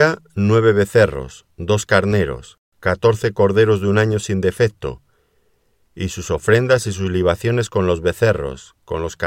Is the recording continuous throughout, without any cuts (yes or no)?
yes